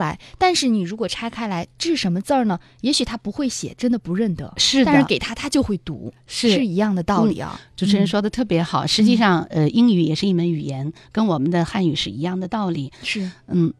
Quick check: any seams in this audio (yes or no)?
no